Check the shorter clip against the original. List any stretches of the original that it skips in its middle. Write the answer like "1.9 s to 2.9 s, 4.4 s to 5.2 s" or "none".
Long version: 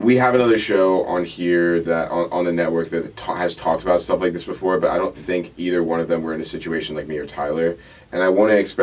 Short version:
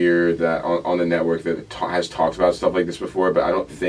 none